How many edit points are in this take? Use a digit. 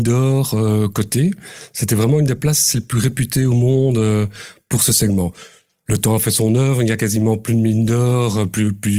0